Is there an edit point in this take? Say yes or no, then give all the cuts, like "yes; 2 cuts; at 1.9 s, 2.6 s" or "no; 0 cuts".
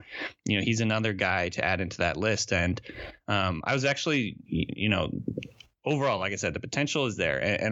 no; 0 cuts